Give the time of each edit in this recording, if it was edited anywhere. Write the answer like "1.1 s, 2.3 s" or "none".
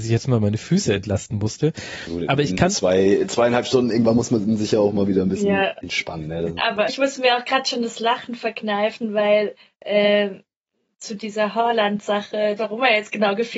6.9 s, 12.6 s